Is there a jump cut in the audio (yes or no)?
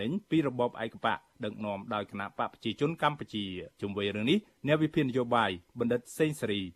yes